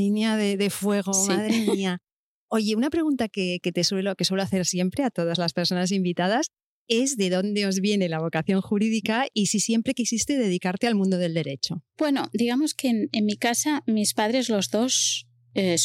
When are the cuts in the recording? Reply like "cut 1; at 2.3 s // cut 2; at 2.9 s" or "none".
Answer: none